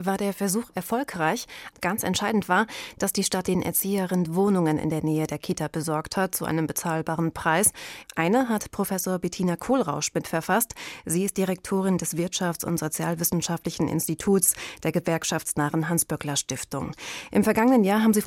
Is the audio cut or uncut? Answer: cut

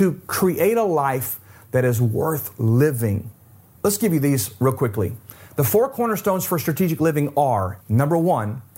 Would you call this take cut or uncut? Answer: cut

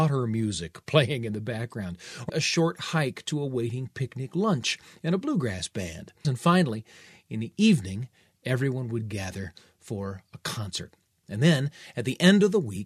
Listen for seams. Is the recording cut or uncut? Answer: cut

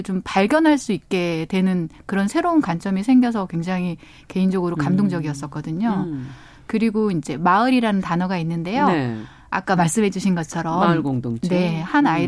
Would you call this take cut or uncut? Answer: uncut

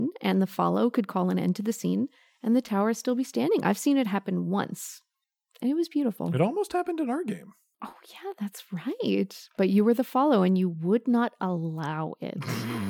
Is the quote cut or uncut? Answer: uncut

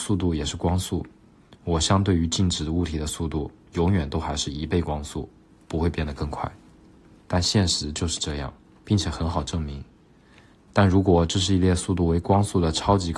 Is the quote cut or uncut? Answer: cut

